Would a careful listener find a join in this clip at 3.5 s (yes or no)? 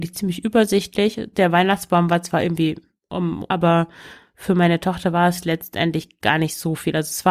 yes